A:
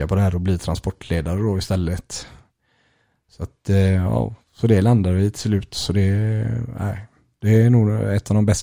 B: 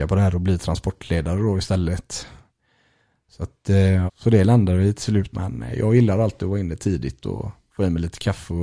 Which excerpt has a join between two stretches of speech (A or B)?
B